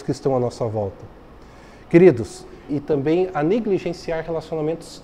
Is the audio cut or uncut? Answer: cut